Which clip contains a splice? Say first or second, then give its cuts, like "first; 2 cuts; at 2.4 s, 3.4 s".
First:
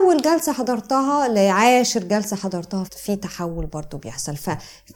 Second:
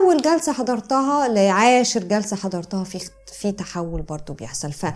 first; 1 cut; at 2.9 s